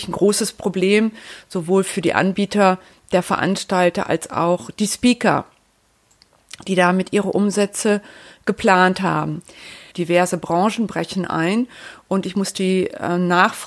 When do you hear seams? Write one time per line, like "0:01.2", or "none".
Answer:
0:09.9